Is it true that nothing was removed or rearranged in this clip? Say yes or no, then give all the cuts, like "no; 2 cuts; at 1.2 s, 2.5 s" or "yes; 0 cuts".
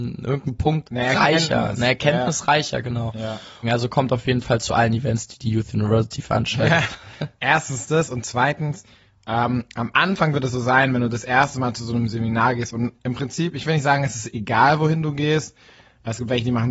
no; 1 cut; at 3.6 s